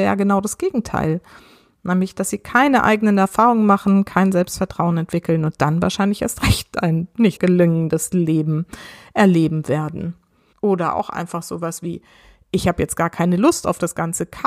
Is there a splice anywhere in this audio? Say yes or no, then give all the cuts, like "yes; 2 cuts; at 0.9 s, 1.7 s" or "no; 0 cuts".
yes; 2 cuts; at 7.4 s, 10.5 s